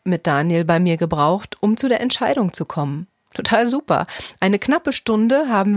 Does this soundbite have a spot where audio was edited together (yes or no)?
no